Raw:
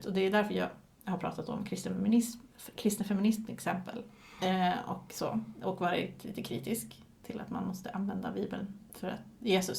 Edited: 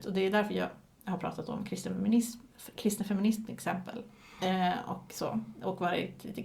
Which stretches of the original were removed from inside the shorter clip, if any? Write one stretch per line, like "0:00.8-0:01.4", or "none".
none